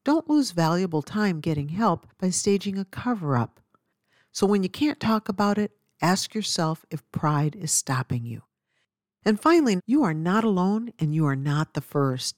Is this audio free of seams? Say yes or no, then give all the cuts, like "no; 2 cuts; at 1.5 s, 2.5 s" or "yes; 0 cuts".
no; 1 cut; at 9.8 s